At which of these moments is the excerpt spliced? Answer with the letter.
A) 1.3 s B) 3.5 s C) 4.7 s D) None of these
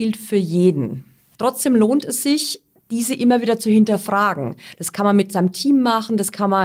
A